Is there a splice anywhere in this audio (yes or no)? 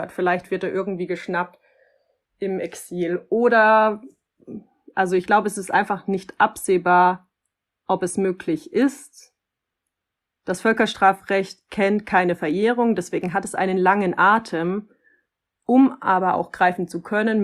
no